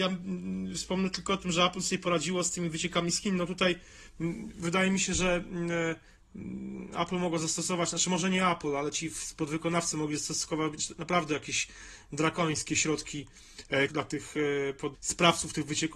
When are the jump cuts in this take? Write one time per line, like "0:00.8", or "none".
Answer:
0:13.9
0:14.9